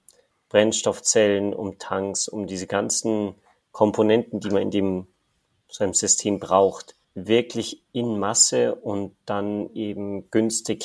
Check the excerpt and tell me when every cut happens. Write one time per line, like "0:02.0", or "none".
0:07.0